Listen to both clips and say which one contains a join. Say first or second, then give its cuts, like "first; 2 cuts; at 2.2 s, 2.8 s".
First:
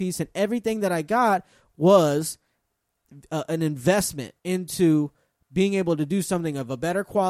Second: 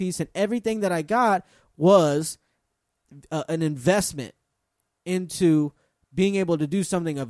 first; 1 cut; at 4.4 s